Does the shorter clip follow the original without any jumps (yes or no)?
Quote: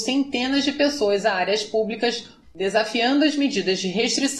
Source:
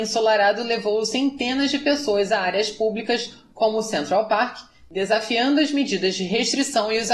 no